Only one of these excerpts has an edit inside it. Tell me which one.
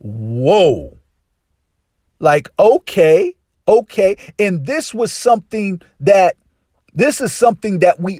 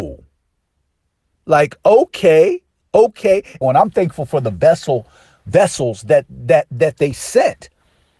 second; 1 cut; at 3.6 s

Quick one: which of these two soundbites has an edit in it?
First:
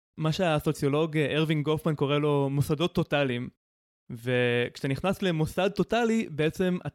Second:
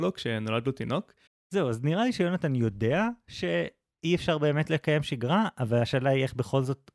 second; 1 cut; at 1.3 s

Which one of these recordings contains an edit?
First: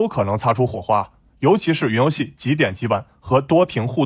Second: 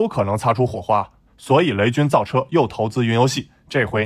second; 1 cut; at 1.3 s

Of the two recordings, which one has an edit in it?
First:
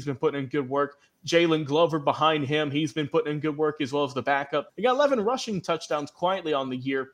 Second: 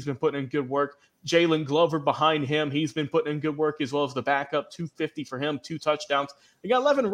first; 1 cut; at 4.7 s

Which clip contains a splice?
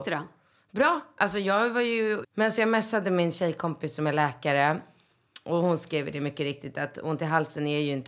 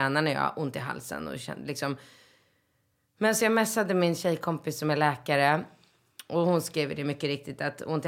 first; 1 cut; at 2.2 s

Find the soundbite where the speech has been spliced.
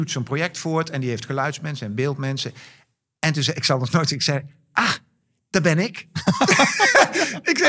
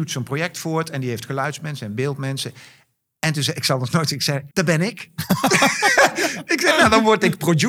second; 1 cut; at 4.5 s

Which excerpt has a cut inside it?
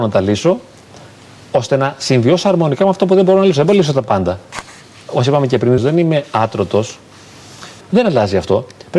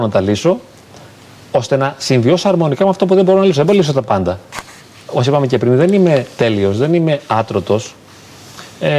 first; 2 cuts; at 5.8 s, 7.8 s

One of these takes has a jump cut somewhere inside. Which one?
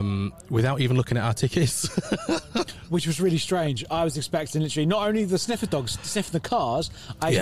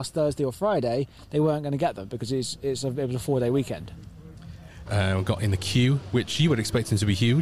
second; 1 cut; at 4.9 s

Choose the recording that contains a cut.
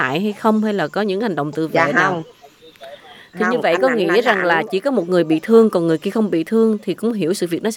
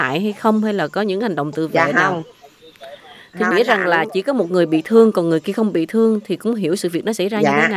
second; 1 cut; at 3.5 s

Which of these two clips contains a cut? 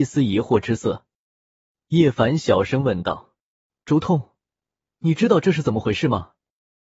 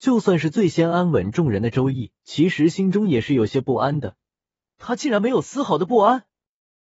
second; 2 cuts; at 2.2 s, 4.7 s

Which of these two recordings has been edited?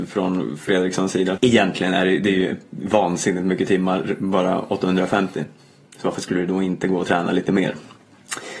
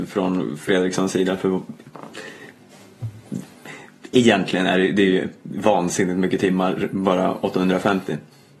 first; 1 cut; at 1.4 s

